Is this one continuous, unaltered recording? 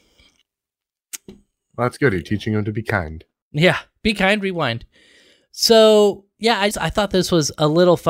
no; 1 cut; at 6.7 s

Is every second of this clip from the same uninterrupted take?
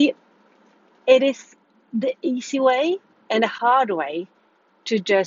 yes; 0 cuts

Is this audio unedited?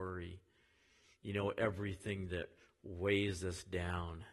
yes; 0 cuts

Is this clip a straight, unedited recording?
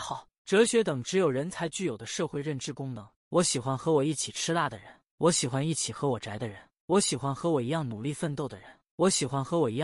no; 1 cut; at 3.2 s

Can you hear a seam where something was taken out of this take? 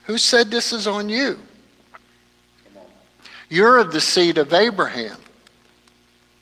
no; 0 cuts

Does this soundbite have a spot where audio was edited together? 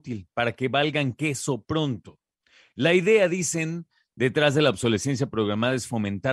no; 0 cuts

